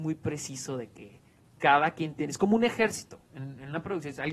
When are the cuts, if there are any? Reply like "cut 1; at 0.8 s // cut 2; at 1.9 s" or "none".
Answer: none